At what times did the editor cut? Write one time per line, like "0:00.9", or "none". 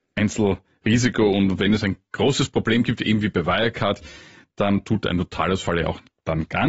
none